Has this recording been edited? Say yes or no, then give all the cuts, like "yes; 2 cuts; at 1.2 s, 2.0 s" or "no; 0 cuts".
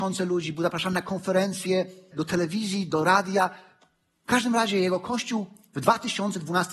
yes; 1 cut; at 2.1 s